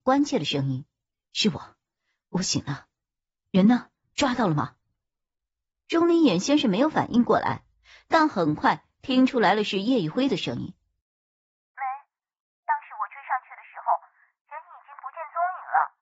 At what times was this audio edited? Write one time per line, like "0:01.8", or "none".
none